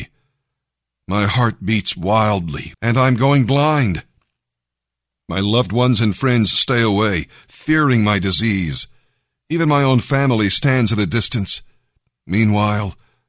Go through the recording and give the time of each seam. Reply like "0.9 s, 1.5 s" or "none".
2.7 s